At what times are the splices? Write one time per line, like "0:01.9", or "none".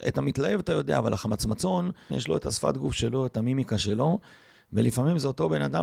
0:02.1